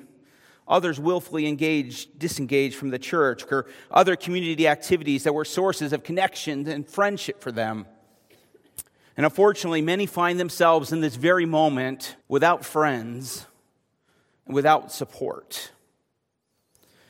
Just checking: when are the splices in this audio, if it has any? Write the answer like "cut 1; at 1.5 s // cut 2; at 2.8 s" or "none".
cut 1; at 3.5 s // cut 2; at 12.2 s